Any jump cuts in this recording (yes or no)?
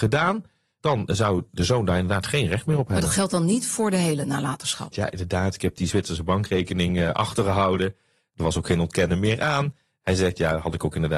yes